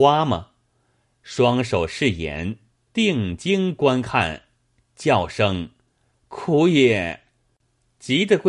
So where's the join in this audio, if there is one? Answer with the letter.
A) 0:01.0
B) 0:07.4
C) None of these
B